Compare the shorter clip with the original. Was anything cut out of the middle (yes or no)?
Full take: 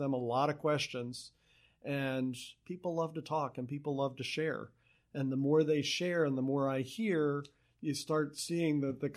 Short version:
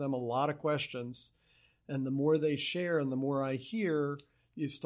yes